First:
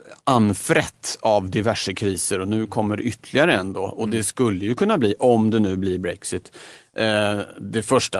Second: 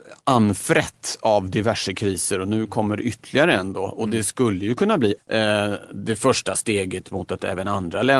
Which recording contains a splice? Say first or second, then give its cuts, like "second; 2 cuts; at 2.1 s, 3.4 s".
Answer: second; 1 cut; at 5.2 s